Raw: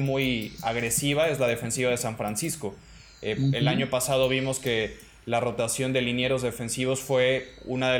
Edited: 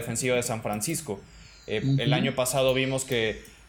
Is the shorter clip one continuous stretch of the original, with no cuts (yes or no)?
yes